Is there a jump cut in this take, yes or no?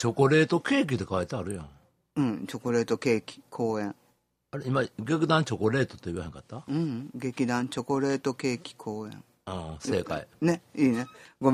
no